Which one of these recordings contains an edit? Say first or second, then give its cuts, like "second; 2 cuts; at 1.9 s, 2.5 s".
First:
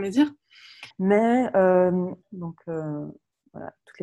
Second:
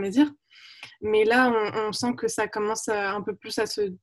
first; 2 cuts; at 0.9 s, 2.2 s